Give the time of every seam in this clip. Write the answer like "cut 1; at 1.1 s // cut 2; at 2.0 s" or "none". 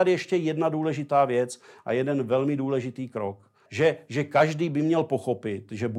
cut 1; at 3.7 s